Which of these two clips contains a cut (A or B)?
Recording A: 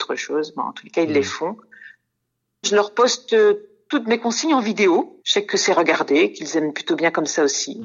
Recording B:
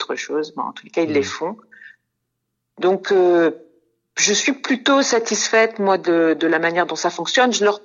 A